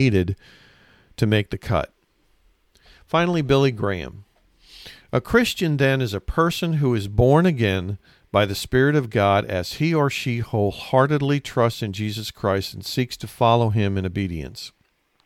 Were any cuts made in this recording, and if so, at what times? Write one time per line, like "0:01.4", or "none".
none